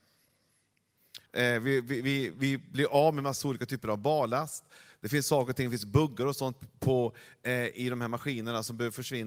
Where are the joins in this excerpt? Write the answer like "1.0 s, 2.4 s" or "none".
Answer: 1.3 s